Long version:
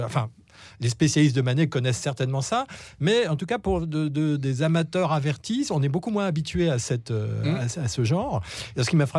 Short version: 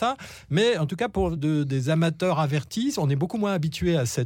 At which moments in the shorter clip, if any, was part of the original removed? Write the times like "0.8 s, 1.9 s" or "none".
1.4 s